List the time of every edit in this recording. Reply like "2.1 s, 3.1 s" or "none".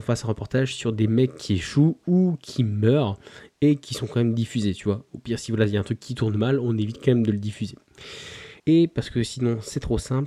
8.6 s